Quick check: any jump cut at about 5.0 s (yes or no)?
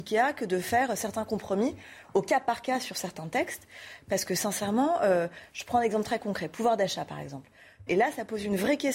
no